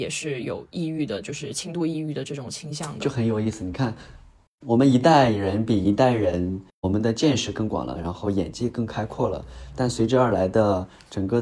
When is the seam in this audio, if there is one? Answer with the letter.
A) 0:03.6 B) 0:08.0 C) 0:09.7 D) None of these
B